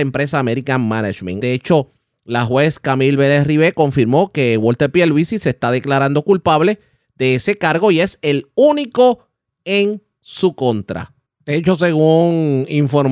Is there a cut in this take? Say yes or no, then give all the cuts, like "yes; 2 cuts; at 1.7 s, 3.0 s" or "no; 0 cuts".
yes; 1 cut; at 1.4 s